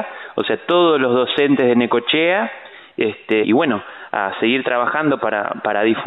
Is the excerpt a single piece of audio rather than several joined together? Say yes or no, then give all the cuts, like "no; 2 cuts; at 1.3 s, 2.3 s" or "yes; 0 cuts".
no; 1 cut; at 3.4 s